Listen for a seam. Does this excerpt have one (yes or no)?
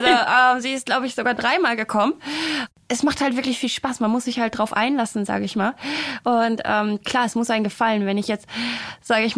no